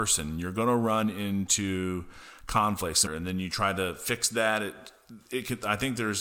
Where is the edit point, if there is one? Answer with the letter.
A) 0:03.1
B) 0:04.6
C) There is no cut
A